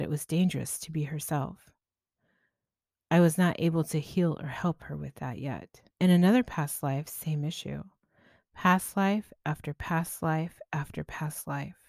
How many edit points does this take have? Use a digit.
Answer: 1